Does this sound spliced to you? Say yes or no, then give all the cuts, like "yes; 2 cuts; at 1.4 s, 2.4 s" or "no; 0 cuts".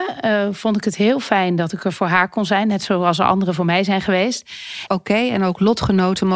yes; 1 cut; at 4.9 s